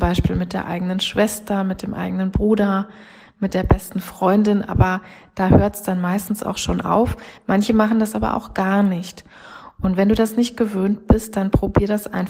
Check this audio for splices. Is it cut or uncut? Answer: uncut